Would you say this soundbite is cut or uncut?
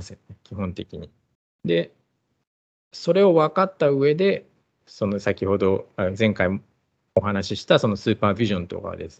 cut